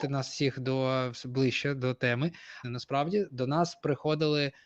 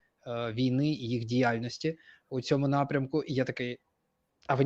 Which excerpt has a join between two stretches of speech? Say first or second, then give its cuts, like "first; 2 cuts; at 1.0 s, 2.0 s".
first; 1 cut; at 2.6 s